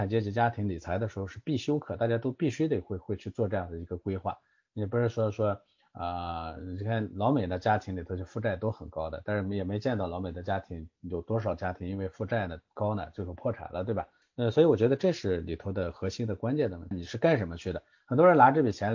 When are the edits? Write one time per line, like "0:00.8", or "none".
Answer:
0:14.2
0:16.9